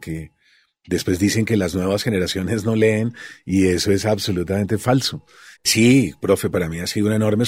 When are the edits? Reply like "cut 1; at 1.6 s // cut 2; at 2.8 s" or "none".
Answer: cut 1; at 5.6 s